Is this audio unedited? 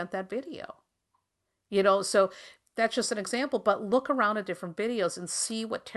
yes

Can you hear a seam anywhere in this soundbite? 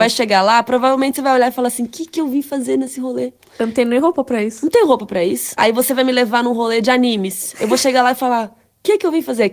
yes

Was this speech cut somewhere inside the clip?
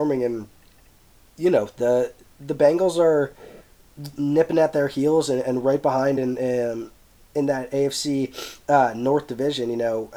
no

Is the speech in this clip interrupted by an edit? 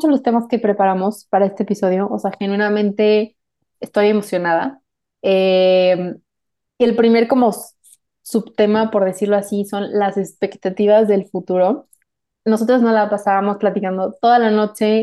no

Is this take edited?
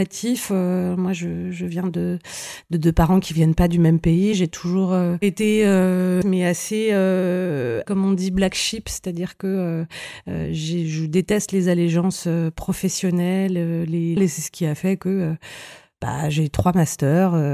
yes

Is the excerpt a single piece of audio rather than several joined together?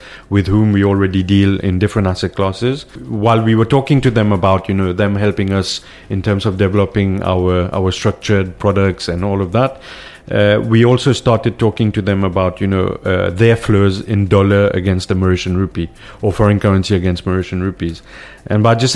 yes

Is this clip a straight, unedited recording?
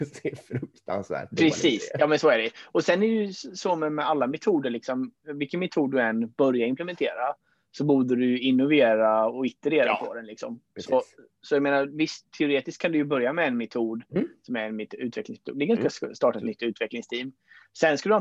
no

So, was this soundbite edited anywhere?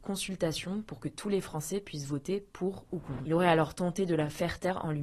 yes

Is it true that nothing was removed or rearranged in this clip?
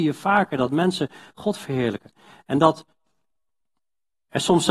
yes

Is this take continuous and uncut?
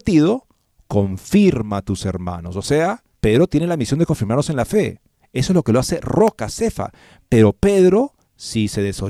no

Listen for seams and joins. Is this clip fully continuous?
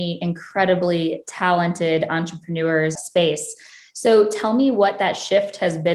no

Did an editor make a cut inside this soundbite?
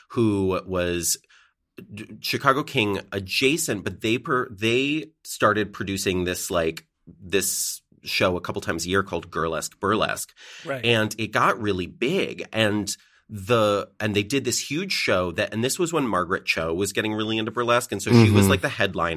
no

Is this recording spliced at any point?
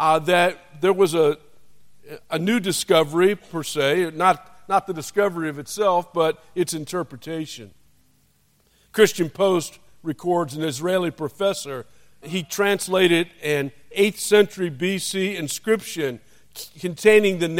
yes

